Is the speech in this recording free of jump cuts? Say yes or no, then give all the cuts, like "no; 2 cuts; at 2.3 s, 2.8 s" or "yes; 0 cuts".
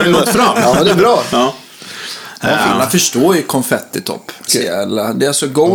no; 1 cut; at 4.5 s